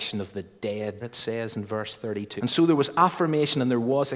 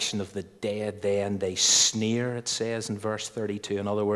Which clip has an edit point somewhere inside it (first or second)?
first